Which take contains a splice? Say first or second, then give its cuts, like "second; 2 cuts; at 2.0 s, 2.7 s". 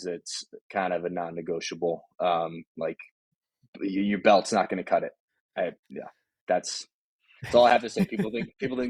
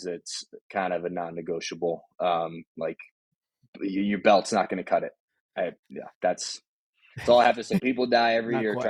second; 2 cuts; at 6.1 s, 7.8 s